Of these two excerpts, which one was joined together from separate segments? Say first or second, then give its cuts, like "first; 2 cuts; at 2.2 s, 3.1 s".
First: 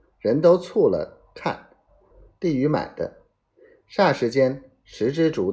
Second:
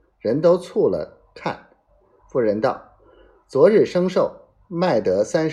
first; 1 cut; at 2.1 s